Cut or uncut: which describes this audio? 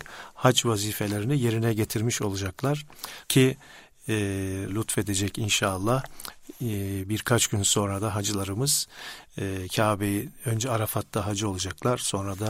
cut